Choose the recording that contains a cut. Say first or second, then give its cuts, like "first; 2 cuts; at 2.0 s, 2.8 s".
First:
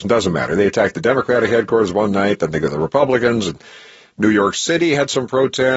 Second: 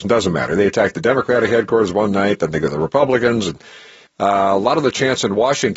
second; 1 cut; at 4.1 s